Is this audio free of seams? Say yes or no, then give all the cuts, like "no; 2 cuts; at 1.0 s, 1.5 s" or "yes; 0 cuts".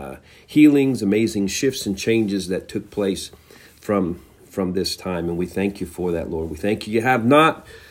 yes; 0 cuts